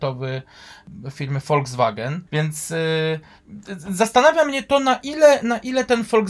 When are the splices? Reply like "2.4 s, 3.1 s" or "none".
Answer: 2.3 s

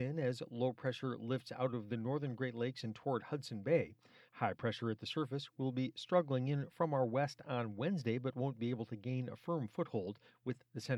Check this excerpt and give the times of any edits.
4.3 s

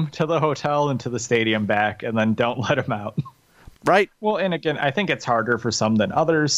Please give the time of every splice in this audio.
3.7 s

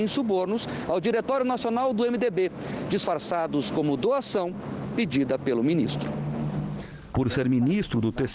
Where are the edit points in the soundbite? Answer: 7.1 s

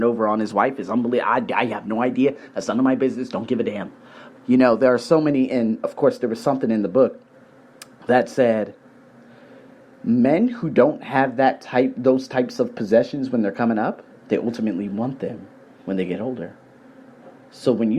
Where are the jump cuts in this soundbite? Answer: 4.3 s

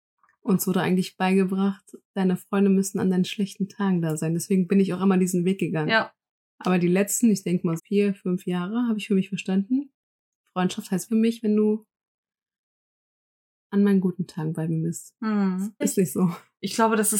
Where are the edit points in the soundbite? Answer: 7.8 s, 11.1 s, 15.8 s

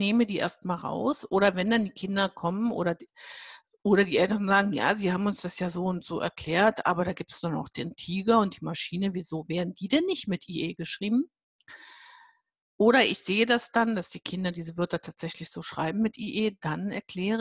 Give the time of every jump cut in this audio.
none

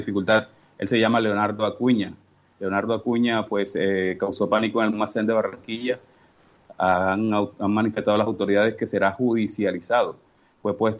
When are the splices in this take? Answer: none

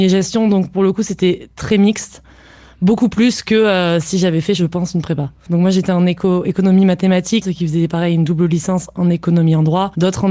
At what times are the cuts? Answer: 5.5 s, 7.4 s

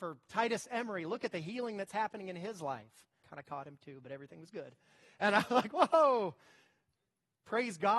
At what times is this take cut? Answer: 3.2 s

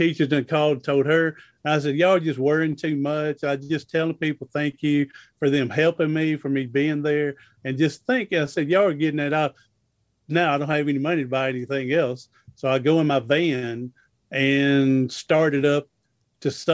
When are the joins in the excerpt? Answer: none

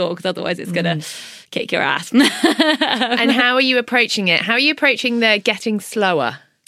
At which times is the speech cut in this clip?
none

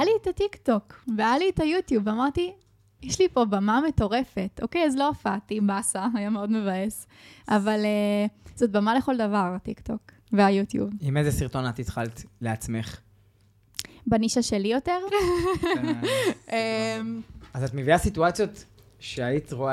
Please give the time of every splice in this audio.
10.2 s, 15.1 s

